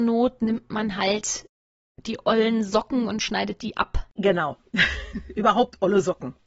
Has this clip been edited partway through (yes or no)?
no